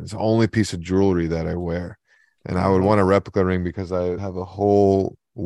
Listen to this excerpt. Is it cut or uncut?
cut